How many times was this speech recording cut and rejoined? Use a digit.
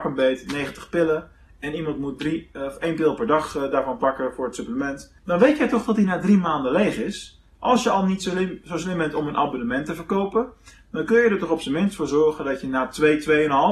1